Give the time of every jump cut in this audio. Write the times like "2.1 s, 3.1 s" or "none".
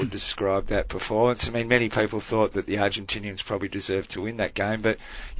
none